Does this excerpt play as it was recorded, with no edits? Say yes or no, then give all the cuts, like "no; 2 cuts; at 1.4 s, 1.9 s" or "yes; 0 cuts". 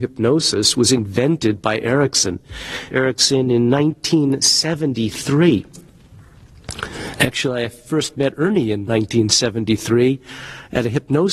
no; 1 cut; at 2.9 s